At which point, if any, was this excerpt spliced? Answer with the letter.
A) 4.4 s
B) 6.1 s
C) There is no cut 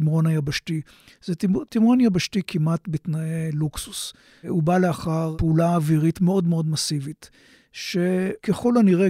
C